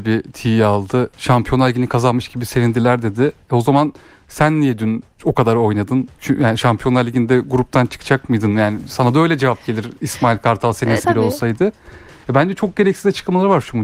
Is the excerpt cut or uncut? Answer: cut